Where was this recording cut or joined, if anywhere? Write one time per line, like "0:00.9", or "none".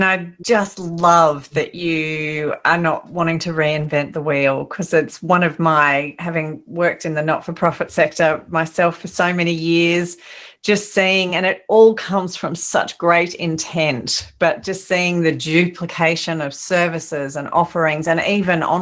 none